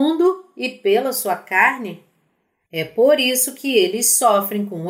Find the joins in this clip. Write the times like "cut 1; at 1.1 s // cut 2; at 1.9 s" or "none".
cut 1; at 2.6 s